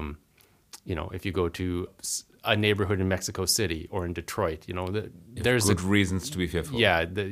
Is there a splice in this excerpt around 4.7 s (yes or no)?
no